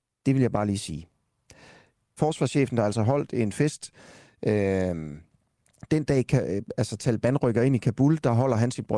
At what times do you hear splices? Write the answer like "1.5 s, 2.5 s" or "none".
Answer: 2.2 s